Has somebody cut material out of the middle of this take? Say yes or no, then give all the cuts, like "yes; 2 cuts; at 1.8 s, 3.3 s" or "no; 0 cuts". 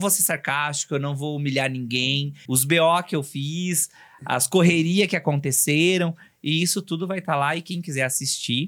yes; 1 cut; at 2.5 s